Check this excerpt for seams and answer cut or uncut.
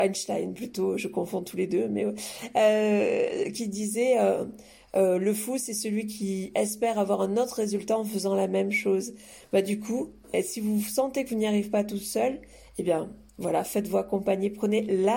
uncut